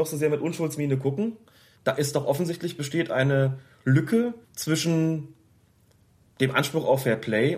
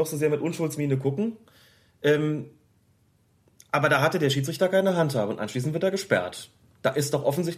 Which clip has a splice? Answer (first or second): first